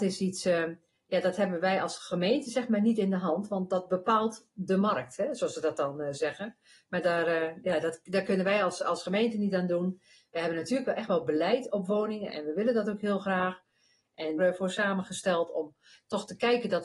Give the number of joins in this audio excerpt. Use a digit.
1